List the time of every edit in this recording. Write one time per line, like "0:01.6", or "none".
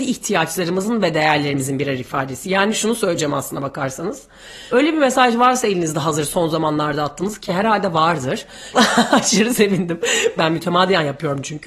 0:04.7
0:08.7
0:10.4

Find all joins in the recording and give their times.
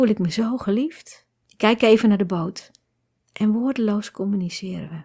0:01.4
0:03.2

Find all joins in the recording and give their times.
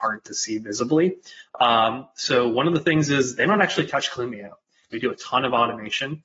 0:01.5
0:04.9

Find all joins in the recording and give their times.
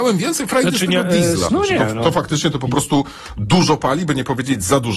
0:01.5

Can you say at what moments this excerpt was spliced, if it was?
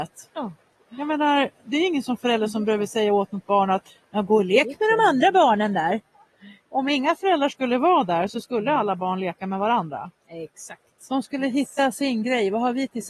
none

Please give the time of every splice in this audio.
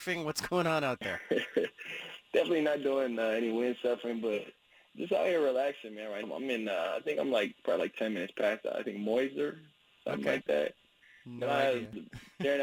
0:06.2

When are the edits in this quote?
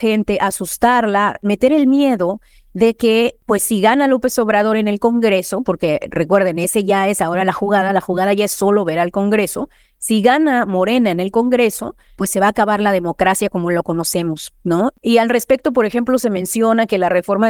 none

